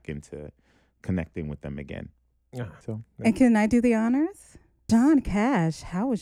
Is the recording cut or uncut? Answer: cut